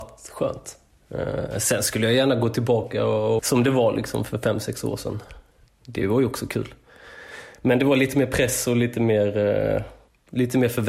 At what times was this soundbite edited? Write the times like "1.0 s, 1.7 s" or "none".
3.4 s, 5.7 s